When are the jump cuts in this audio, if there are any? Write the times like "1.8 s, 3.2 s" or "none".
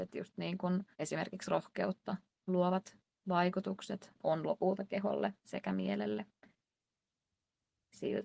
0.9 s, 4.1 s